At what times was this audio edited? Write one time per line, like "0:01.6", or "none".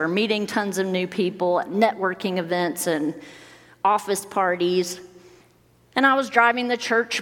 none